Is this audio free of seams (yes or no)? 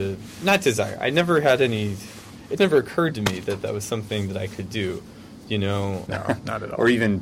no